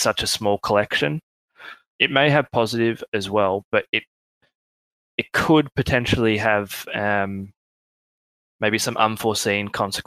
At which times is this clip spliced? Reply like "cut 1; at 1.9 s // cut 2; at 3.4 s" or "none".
cut 1; at 1.9 s